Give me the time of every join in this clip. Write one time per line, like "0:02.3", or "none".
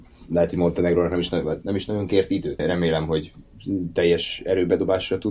0:02.6